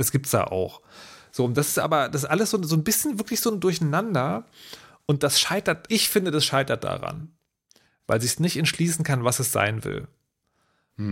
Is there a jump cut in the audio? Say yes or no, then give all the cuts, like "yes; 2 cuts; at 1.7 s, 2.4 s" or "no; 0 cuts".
yes; 1 cut; at 5.9 s